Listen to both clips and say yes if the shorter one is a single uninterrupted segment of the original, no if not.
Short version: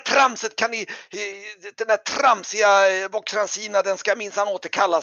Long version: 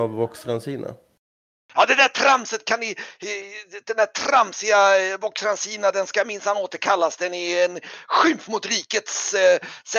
yes